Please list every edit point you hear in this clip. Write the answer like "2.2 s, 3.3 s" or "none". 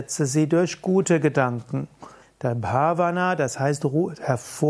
2.2 s